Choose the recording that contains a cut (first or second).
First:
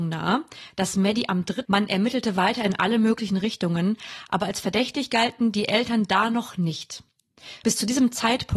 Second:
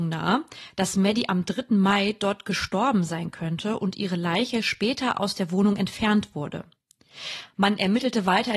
first